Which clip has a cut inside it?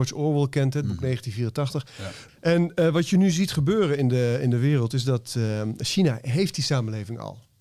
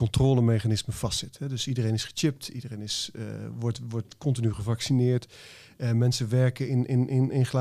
first; 1 cut; at 2.3 s

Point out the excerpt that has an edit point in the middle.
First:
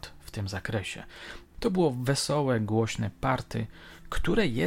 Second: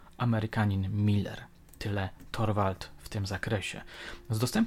first; 1 cut; at 1.4 s

